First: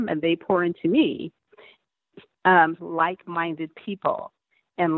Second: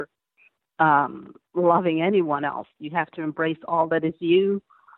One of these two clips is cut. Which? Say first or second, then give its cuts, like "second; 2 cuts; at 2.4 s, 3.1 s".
first; 1 cut; at 2.8 s